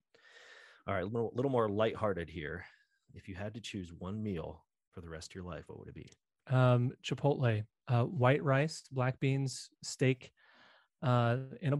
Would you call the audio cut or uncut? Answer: uncut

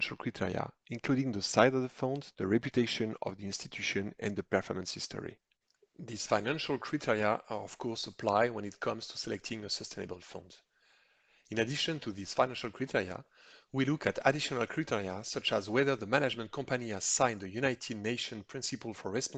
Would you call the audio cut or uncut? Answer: cut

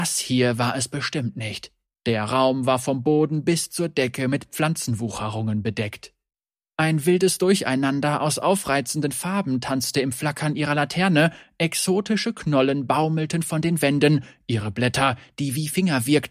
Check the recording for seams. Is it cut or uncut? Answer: uncut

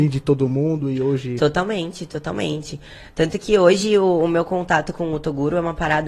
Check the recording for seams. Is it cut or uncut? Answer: uncut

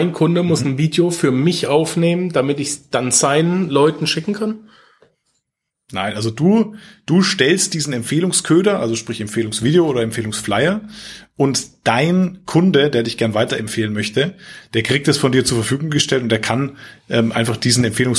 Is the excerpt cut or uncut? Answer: uncut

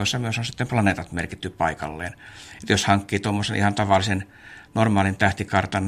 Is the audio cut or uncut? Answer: uncut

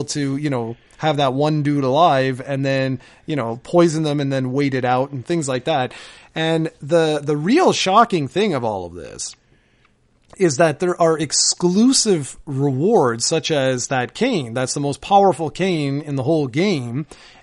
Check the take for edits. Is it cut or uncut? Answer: uncut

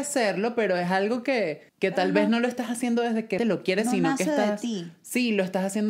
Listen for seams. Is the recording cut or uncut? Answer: cut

